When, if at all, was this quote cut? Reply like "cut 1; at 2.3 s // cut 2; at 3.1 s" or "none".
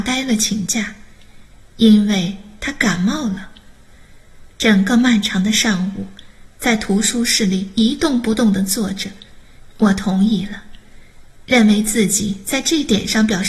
cut 1; at 4.6 s // cut 2; at 9.7 s